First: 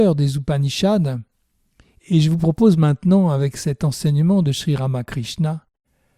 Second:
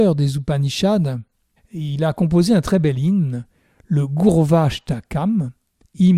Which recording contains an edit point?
second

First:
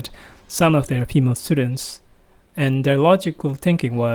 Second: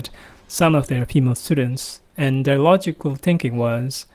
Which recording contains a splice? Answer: second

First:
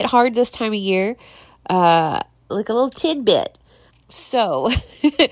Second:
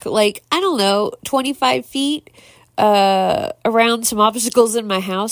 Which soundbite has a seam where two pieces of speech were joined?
first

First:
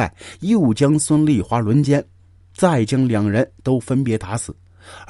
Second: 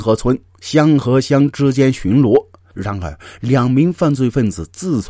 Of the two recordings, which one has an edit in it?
second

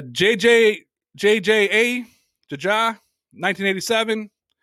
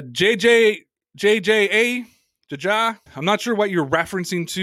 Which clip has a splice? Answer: second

